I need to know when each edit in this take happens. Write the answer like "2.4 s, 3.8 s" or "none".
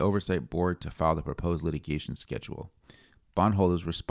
none